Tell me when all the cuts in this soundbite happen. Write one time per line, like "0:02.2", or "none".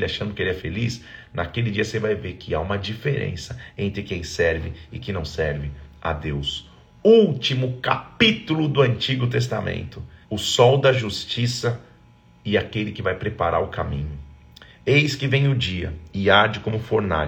0:10.2